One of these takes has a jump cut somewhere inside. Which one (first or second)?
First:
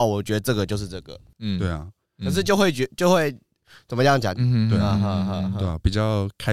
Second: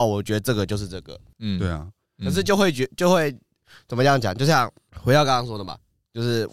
first